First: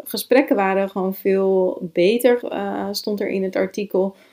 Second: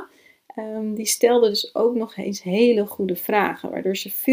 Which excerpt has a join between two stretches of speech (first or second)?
first